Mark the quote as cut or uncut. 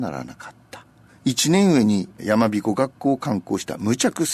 cut